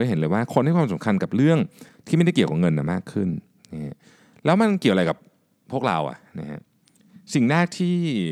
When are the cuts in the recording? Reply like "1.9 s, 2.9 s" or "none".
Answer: none